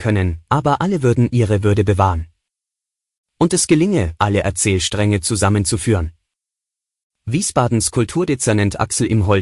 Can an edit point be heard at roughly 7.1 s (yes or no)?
no